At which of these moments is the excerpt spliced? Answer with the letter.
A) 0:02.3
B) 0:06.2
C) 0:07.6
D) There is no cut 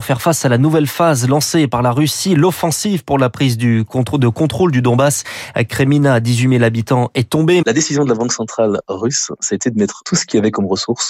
C